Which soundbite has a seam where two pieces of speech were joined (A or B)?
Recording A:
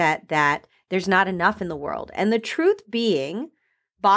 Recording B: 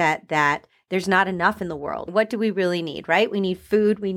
B